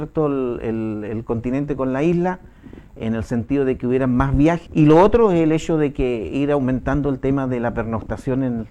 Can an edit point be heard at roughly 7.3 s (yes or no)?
no